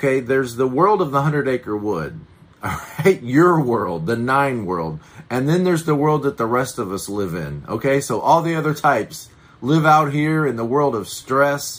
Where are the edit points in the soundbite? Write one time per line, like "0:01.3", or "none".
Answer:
none